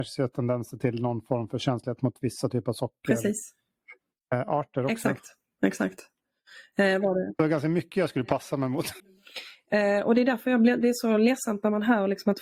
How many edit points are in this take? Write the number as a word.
one